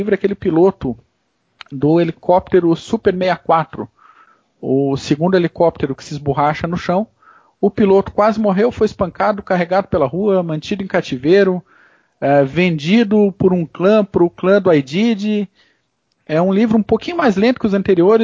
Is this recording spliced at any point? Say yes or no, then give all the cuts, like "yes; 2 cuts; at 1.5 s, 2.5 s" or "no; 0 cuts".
no; 0 cuts